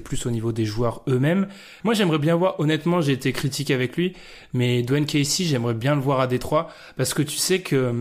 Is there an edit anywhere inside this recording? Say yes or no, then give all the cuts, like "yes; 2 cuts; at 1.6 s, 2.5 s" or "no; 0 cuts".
yes; 1 cut; at 1.8 s